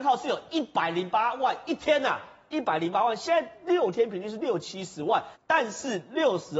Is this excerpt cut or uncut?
cut